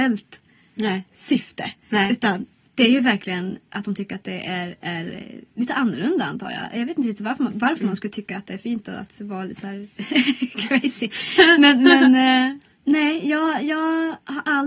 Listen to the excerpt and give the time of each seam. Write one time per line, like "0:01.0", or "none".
none